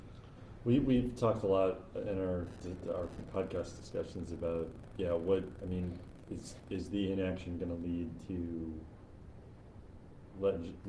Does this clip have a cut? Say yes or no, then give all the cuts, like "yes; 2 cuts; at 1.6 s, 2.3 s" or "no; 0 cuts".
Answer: no; 0 cuts